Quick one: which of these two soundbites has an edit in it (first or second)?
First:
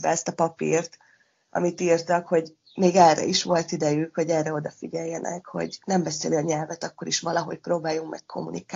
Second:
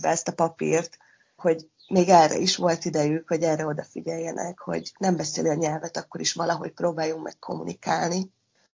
second